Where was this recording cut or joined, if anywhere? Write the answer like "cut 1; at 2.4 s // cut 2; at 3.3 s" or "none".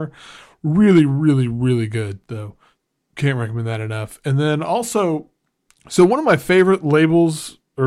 none

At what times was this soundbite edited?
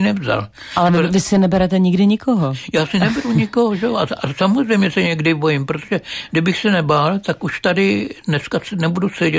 none

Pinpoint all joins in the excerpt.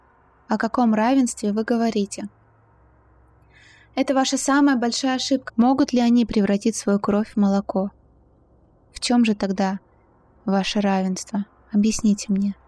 cut 1; at 5.5 s

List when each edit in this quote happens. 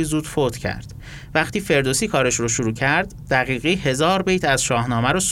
none

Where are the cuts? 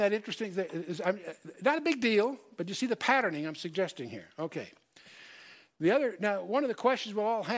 none

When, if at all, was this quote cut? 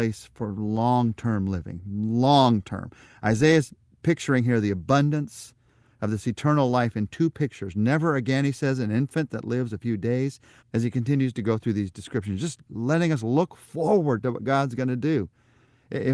cut 1; at 10.6 s

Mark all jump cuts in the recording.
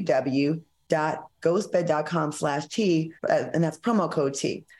cut 1; at 3.2 s

